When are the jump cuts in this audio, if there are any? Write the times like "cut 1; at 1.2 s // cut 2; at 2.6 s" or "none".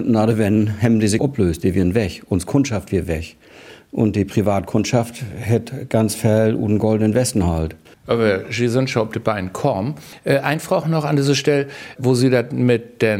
cut 1; at 1.2 s // cut 2; at 7.9 s